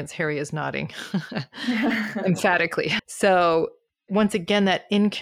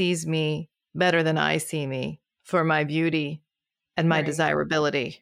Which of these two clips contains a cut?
first; 1 cut; at 3.0 s

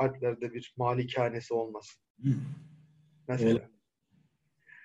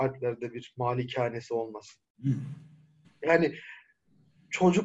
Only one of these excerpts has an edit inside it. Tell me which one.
second; 1 cut; at 3.0 s

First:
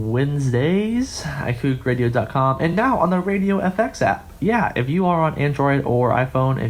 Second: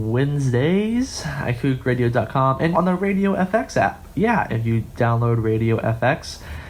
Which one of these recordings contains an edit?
second; 2 cuts; at 2.7 s, 4.5 s

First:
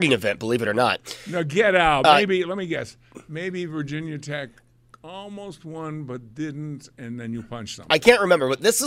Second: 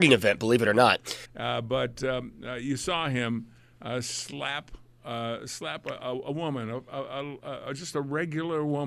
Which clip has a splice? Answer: second; 1 cut; at 1.2 s

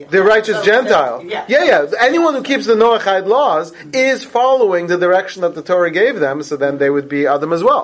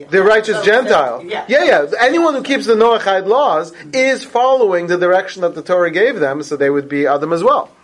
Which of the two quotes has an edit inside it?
second; 1 cut; at 6.6 s

